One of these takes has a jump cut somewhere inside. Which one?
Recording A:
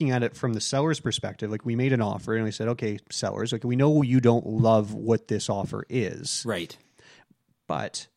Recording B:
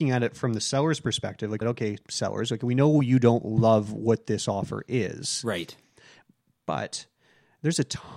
B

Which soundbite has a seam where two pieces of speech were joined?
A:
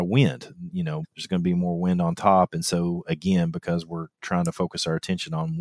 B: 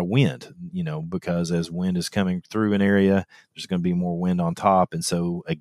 A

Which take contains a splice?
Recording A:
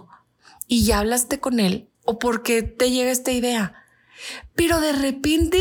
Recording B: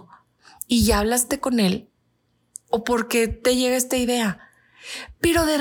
A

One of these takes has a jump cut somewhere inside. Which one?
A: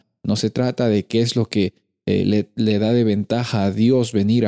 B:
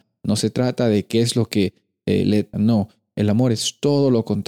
B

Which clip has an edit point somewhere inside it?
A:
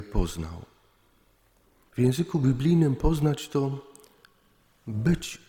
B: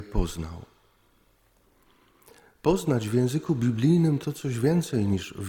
A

